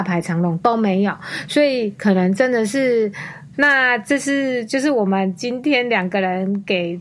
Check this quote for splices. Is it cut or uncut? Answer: cut